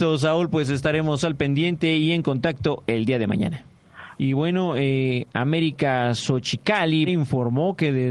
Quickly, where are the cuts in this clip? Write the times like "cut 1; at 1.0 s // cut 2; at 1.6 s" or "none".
cut 1; at 4.2 s // cut 2; at 7.1 s